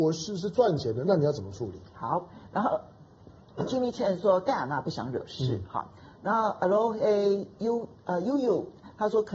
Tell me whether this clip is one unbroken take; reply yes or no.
yes